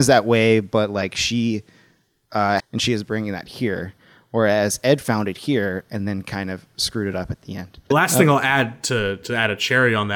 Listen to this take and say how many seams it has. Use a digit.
2